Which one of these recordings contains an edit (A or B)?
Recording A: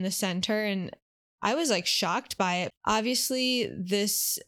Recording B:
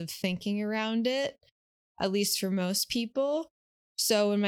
A